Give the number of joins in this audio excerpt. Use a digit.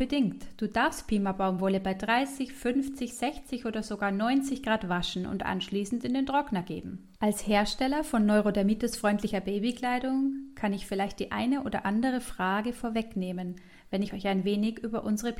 1